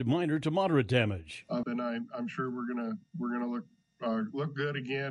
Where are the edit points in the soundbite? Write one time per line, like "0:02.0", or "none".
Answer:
0:01.6